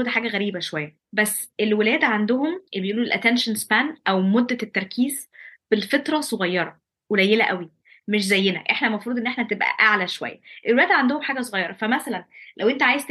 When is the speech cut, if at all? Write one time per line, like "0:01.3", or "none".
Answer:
0:01.0
0:02.7